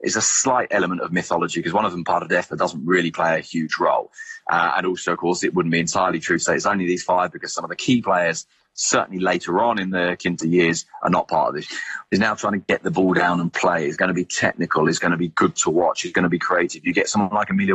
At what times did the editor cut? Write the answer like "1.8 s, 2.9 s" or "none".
12.1 s